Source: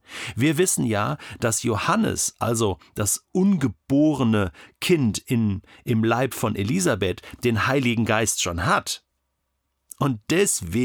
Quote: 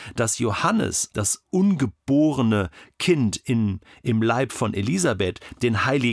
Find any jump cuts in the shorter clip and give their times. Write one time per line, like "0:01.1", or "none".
0:01.1